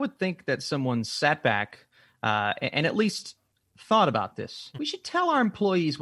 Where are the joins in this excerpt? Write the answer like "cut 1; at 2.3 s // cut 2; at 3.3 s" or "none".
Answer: cut 1; at 4.7 s